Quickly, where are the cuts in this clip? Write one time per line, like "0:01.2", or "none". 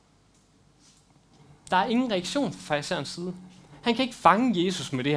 none